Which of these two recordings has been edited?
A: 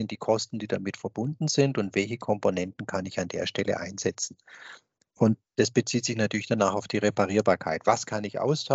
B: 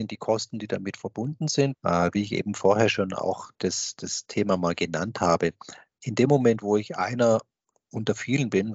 B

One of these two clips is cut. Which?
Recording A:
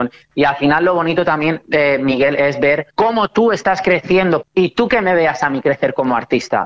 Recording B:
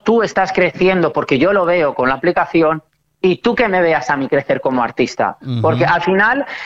A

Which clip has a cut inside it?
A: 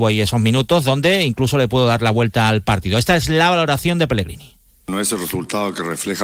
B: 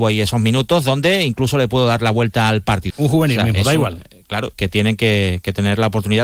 B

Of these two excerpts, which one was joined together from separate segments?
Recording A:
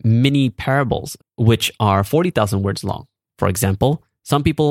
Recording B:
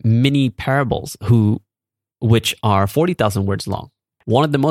A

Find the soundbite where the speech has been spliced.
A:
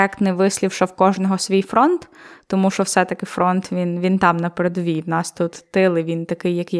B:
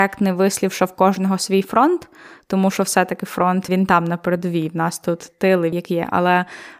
B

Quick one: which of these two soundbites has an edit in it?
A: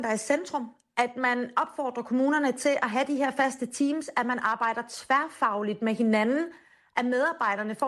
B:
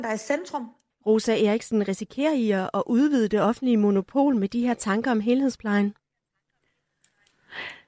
B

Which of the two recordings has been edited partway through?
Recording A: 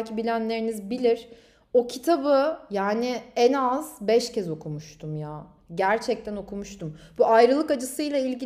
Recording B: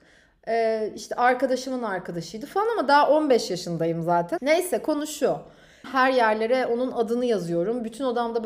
B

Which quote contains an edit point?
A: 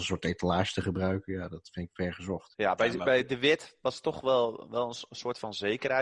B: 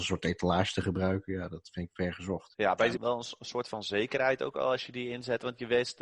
B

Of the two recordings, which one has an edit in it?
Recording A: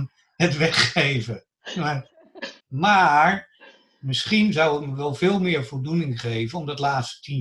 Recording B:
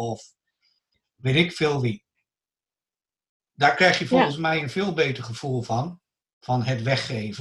A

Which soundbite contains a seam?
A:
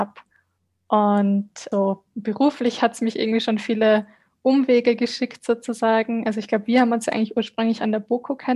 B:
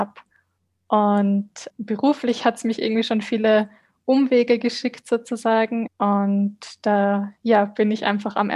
B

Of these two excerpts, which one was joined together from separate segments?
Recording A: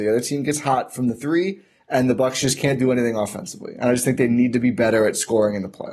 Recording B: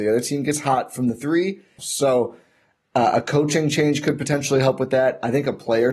B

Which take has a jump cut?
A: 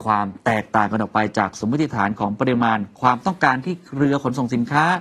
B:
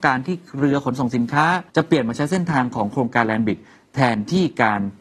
B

